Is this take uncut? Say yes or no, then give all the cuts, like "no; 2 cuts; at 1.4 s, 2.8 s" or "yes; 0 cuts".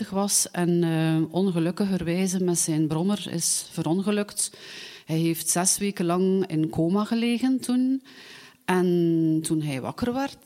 yes; 0 cuts